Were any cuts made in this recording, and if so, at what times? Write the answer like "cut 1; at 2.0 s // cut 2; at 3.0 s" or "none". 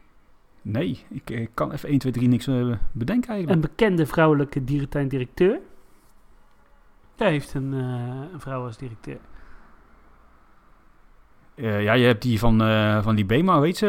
cut 1; at 7.2 s